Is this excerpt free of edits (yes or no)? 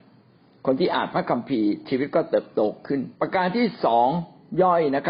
no